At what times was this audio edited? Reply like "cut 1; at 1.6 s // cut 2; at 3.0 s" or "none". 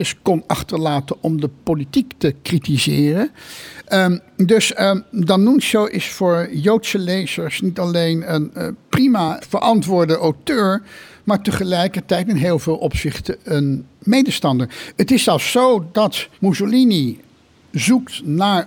cut 1; at 9.4 s // cut 2; at 16.3 s